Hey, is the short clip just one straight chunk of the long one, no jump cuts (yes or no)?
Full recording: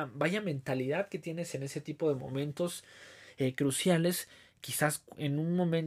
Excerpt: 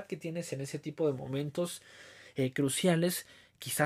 yes